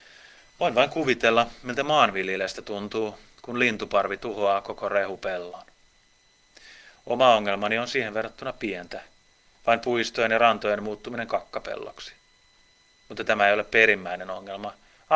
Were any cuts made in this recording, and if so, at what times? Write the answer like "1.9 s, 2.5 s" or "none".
none